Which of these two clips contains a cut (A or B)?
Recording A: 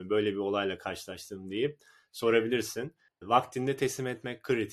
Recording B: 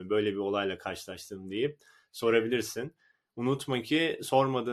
A